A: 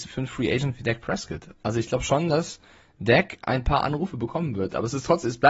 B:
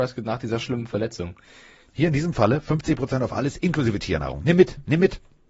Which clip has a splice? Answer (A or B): B